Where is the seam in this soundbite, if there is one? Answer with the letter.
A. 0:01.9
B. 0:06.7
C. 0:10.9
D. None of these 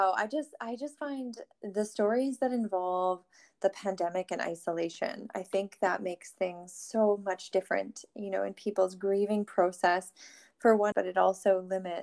C